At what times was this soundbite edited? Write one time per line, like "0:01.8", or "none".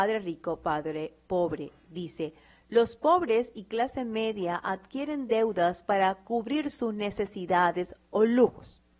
none